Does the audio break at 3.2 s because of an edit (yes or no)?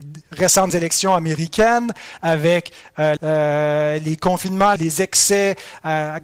yes